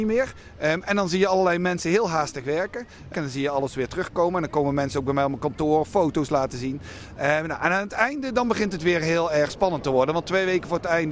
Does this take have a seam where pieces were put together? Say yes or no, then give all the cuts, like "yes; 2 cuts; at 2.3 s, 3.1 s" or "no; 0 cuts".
yes; 1 cut; at 3.1 s